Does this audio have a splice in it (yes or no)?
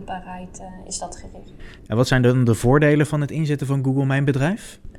no